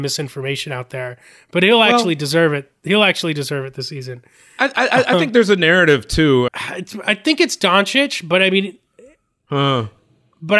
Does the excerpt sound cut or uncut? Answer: cut